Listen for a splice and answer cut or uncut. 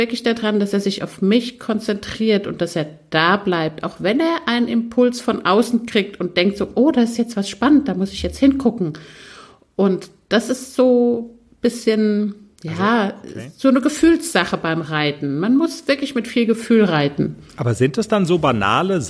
uncut